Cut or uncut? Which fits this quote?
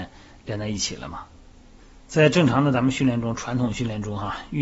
uncut